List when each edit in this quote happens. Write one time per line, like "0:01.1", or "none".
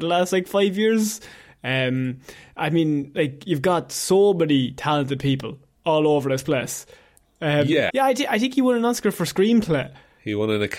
0:07.9